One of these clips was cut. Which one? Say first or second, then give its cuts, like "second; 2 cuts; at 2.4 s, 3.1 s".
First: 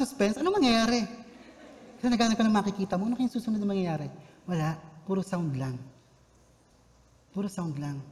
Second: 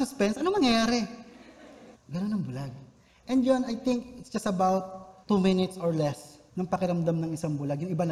second; 3 cuts; at 1.9 s, 5.2 s, 6.5 s